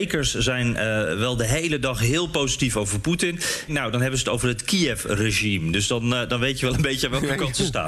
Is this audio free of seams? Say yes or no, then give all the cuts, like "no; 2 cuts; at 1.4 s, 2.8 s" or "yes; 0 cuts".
no; 1 cut; at 3.7 s